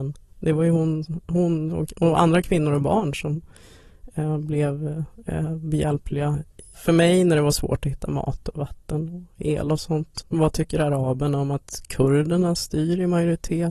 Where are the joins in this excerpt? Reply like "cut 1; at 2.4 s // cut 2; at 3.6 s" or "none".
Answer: cut 1; at 6.7 s // cut 2; at 10.2 s